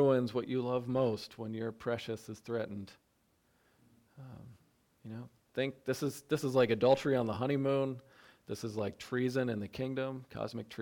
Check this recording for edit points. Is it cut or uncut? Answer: uncut